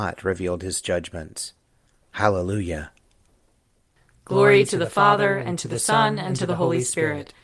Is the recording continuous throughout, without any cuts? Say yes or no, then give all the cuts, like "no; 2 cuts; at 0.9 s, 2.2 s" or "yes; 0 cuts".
yes; 0 cuts